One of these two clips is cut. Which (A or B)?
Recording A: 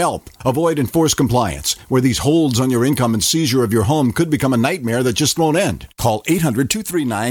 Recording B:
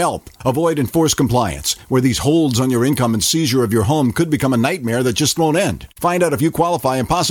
B